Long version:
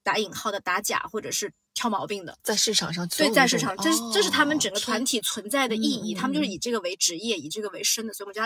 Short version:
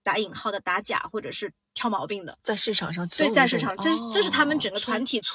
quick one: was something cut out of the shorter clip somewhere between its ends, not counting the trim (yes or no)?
no